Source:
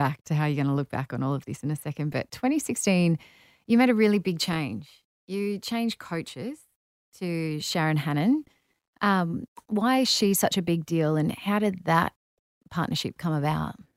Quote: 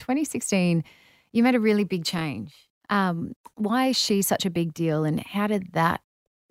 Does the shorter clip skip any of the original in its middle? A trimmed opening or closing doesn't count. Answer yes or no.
yes